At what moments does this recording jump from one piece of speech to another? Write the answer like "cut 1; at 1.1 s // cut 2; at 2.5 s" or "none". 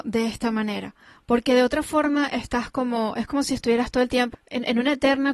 cut 1; at 4.3 s